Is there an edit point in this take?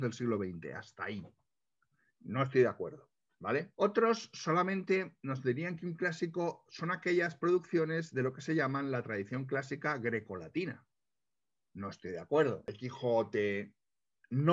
yes; 1 cut; at 12.7 s

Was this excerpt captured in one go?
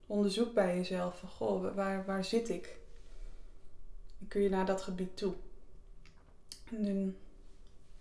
yes; 0 cuts

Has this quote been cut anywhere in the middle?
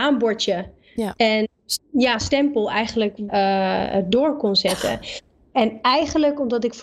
yes; 2 cuts; at 1.8 s, 3.3 s

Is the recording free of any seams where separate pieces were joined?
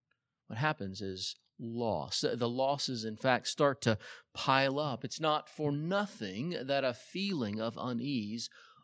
yes; 0 cuts

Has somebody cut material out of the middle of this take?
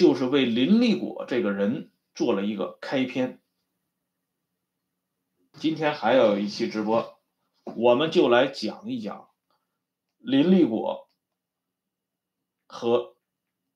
yes; 1 cut; at 5.5 s

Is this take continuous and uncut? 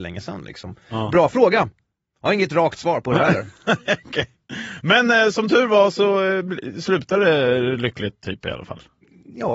yes; 0 cuts

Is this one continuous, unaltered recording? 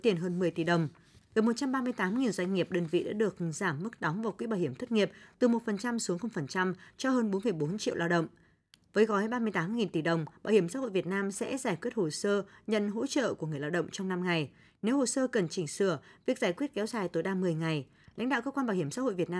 yes; 0 cuts

